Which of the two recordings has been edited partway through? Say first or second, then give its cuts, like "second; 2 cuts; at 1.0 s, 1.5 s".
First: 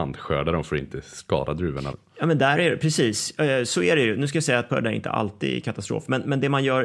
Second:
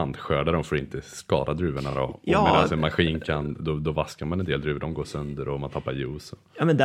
first; 2 cuts; at 1.9 s, 4.7 s